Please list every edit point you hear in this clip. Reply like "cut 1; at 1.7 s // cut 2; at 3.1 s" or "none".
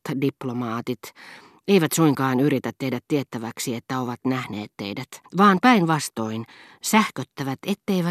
cut 1; at 5.3 s